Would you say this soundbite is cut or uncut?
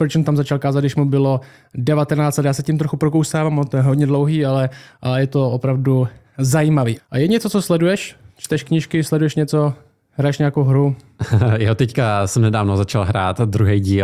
cut